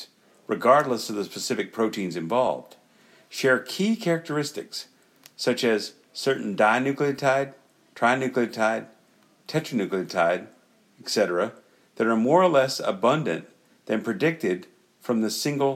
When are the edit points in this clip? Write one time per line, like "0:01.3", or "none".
none